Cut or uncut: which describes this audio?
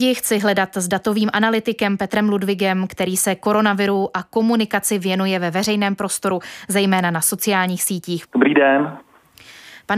cut